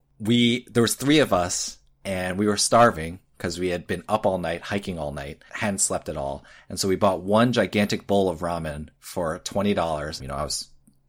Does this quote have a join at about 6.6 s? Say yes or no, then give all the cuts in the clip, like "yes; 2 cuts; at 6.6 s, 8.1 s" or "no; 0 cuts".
no; 1 cut; at 10.2 s